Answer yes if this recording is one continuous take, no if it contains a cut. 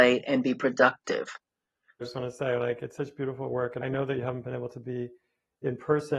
no